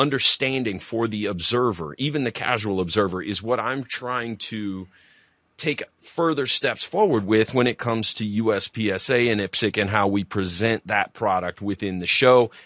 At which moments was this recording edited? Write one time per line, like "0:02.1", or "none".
none